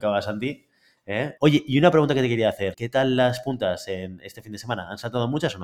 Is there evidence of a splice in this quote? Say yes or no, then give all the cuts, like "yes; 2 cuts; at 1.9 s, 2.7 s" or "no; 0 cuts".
yes; 2 cuts; at 1.4 s, 2.7 s